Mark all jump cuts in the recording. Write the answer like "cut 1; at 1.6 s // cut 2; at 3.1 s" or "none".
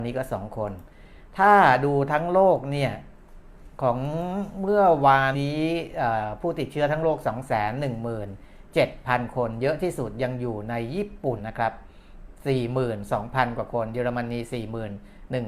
cut 1; at 5.3 s // cut 2; at 11.4 s